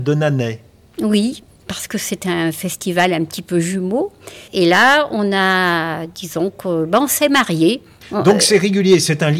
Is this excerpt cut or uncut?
cut